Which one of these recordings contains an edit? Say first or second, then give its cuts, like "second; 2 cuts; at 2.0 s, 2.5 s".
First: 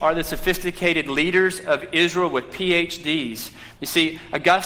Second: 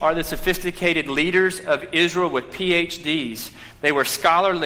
first; 1 cut; at 3.8 s